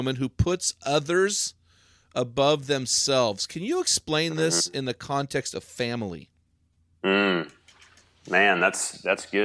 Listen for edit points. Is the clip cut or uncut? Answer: uncut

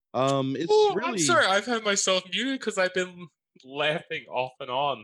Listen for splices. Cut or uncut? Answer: uncut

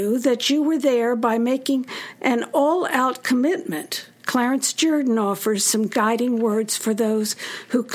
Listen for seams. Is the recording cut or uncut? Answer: cut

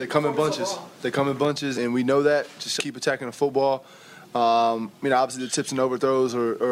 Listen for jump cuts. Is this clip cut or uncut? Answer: cut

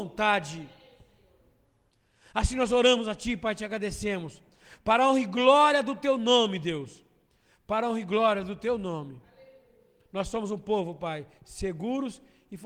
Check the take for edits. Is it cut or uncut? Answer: uncut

